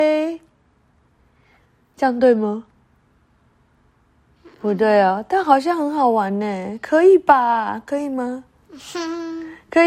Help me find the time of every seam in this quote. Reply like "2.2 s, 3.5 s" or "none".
none